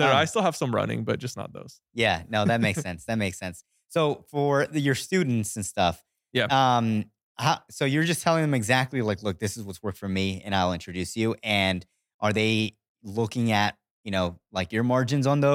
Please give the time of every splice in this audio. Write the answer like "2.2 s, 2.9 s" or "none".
none